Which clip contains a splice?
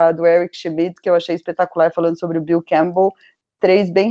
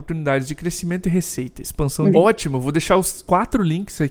second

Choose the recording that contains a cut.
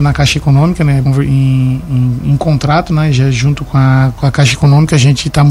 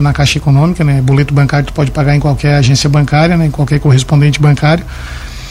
first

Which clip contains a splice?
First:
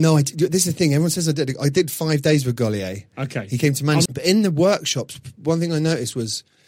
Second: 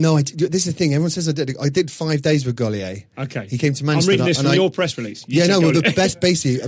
first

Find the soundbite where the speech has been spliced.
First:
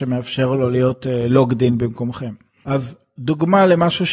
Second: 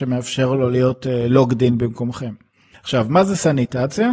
first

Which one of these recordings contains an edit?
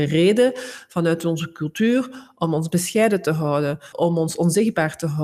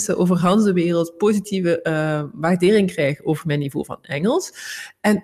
first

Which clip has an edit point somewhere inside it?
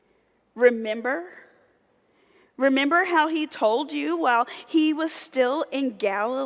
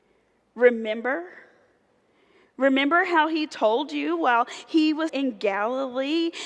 second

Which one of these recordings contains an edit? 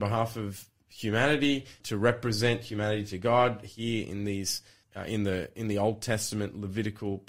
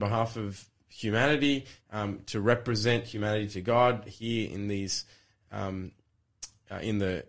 first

